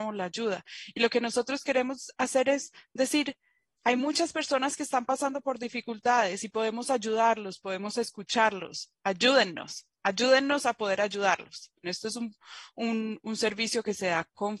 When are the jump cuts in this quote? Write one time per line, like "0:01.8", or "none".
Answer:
0:11.8